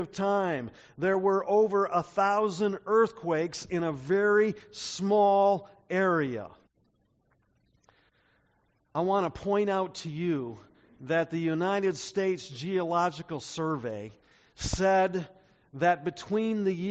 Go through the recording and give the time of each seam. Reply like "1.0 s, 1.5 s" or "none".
none